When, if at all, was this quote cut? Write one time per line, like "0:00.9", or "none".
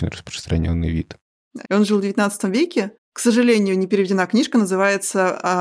0:01.6